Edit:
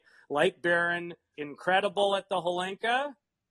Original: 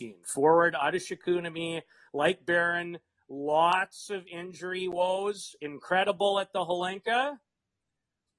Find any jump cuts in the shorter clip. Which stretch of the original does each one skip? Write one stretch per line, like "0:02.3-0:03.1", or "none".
0:03.2-0:05.6